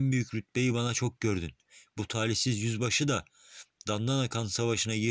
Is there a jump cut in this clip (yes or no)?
no